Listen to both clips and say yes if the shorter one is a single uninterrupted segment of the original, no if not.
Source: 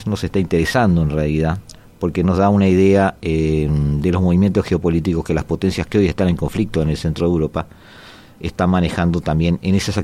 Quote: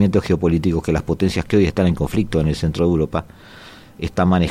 yes